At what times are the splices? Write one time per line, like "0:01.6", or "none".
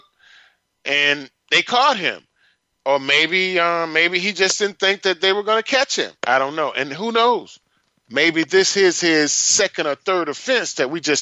0:06.2